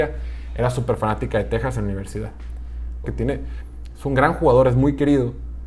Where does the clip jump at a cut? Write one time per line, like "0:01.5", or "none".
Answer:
0:03.0